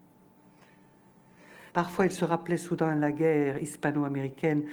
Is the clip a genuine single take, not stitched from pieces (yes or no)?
no